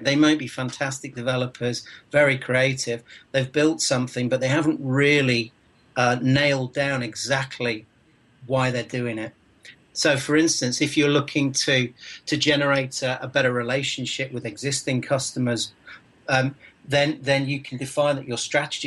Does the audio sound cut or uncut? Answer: cut